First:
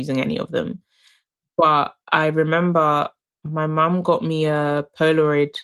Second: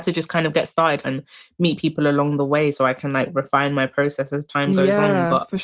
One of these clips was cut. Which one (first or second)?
second